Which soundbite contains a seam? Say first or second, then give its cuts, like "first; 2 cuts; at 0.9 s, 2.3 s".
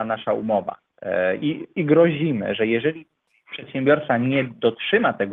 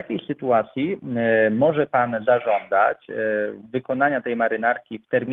first; 1 cut; at 1.4 s